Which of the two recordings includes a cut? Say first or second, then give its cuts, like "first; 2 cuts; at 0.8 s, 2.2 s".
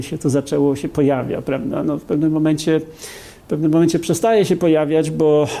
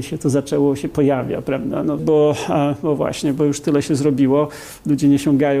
second; 1 cut; at 2.0 s